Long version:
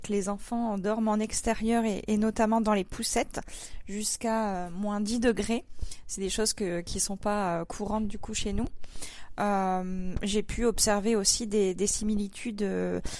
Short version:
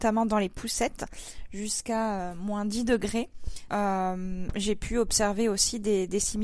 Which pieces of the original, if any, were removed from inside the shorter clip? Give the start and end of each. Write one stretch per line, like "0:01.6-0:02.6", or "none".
0:06.0-0:09.4